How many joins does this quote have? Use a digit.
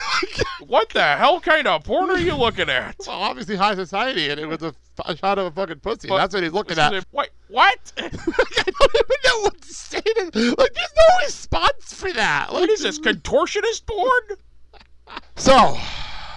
2